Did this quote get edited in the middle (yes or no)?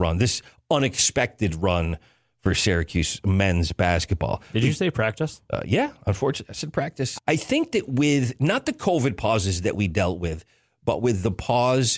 yes